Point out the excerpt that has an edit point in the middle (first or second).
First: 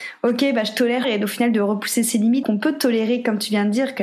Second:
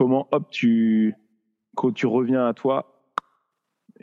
first